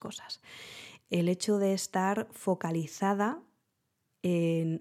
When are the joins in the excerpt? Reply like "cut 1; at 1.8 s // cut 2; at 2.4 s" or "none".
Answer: cut 1; at 1.0 s